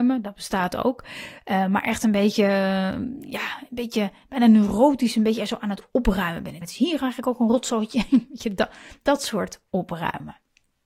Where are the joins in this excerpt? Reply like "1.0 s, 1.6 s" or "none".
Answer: 6.6 s